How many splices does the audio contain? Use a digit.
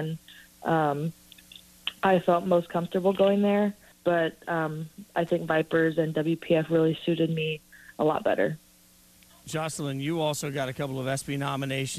1